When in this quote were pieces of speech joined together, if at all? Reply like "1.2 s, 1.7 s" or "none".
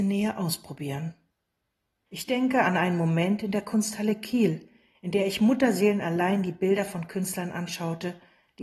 2.1 s